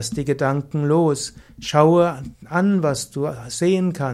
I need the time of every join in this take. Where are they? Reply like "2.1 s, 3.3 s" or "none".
none